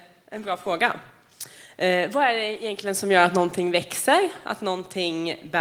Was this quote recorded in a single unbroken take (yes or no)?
yes